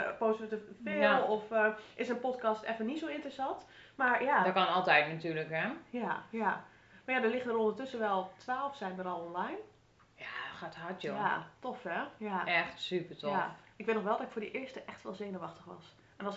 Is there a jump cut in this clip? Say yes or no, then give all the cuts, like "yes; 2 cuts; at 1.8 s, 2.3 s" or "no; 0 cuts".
no; 0 cuts